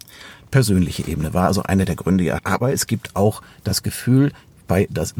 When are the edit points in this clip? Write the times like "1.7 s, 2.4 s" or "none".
2.4 s